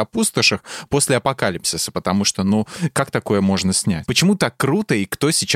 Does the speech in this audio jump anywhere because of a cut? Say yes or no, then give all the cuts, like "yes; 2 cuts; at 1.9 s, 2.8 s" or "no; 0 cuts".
no; 0 cuts